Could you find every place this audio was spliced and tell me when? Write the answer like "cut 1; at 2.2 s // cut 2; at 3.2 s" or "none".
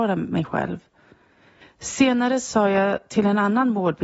cut 1; at 1.6 s